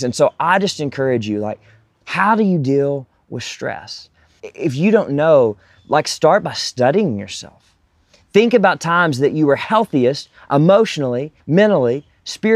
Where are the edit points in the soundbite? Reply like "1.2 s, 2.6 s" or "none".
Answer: 4.4 s, 11.4 s